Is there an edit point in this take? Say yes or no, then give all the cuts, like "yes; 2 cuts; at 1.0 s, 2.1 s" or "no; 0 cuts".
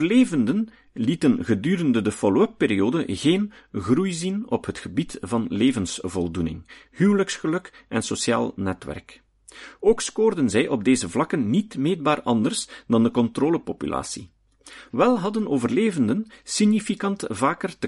yes; 1 cut; at 6.9 s